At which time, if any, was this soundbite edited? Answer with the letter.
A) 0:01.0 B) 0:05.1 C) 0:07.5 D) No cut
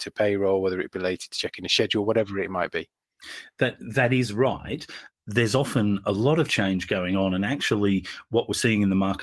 B